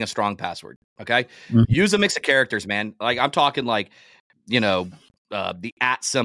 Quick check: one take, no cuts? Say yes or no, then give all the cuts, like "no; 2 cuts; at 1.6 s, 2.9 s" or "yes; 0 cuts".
yes; 0 cuts